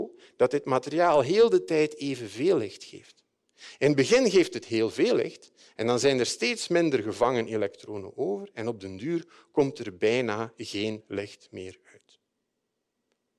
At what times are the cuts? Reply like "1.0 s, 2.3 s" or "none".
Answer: none

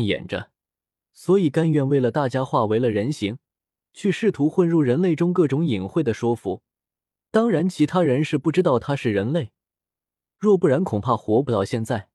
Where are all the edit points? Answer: 1.0 s

